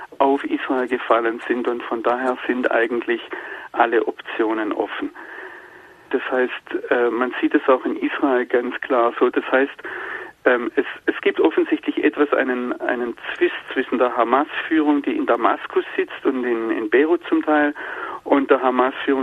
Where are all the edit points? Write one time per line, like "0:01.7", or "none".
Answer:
0:06.1
0:09.3